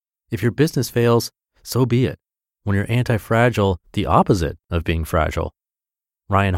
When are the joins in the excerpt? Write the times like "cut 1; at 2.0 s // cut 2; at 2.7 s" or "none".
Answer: cut 1; at 3.8 s